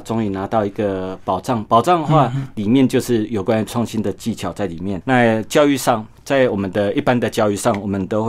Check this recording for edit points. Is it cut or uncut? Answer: cut